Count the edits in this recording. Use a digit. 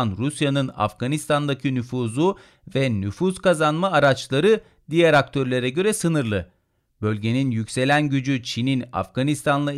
0